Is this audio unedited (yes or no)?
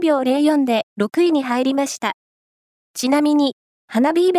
no